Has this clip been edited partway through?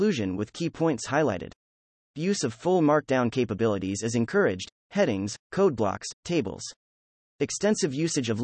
no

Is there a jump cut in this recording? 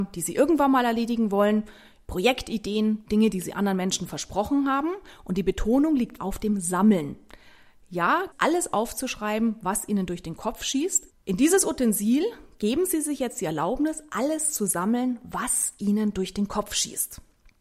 yes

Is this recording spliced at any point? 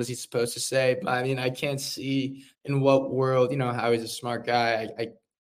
yes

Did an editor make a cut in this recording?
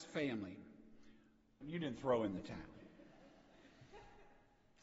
yes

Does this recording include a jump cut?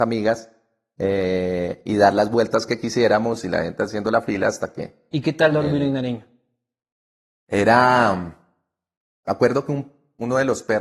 no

